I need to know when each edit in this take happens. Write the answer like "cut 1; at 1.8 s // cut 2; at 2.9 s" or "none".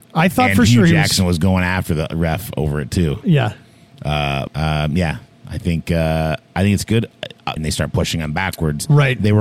cut 1; at 4.5 s // cut 2; at 7.6 s